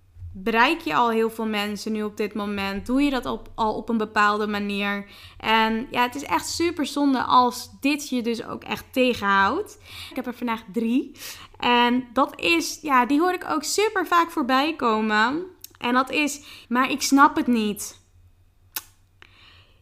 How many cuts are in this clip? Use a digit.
2